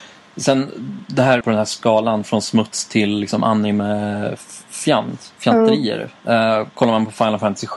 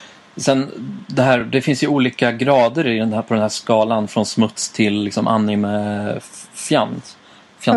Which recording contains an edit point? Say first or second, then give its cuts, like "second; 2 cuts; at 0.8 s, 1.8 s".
first; 2 cuts; at 1.4 s, 5.4 s